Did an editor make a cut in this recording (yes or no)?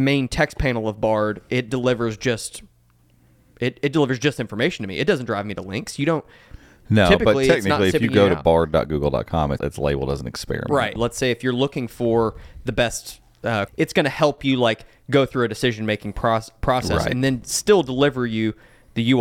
yes